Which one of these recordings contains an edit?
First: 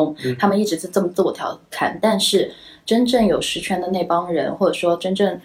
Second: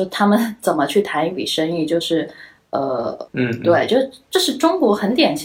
second; 1 cut; at 3.3 s

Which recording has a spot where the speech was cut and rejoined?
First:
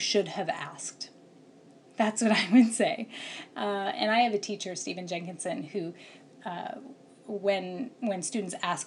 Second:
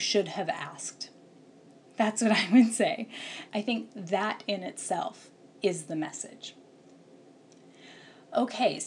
second; 1 cut; at 3.5 s

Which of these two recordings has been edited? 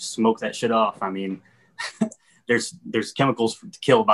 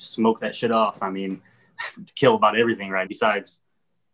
second; 2 cuts; at 1.9 s, 3.1 s

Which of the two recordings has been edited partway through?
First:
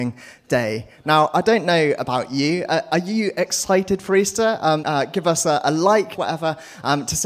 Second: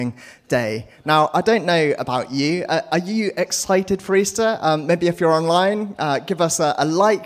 first; 2 cuts; at 4.8 s, 6.1 s

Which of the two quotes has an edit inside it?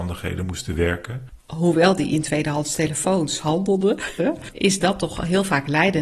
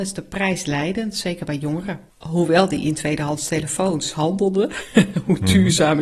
first; 2 cuts; at 1.4 s, 4.2 s

